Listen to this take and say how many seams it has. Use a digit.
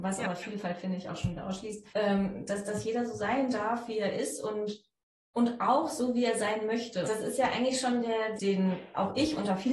3